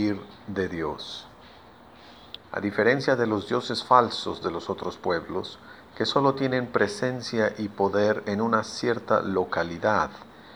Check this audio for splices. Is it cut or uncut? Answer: cut